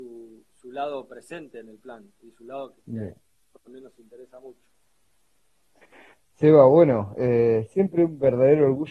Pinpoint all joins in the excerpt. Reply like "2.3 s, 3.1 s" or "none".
none